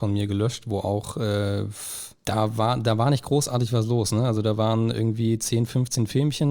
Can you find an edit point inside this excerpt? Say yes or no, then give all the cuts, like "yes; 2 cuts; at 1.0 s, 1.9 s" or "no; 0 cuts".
yes; 1 cut; at 2.2 s